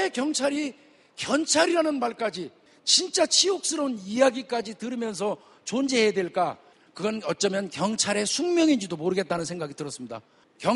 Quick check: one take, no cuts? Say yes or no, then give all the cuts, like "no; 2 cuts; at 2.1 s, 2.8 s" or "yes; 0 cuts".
yes; 0 cuts